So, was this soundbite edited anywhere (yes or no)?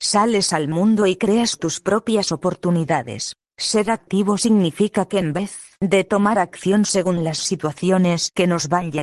no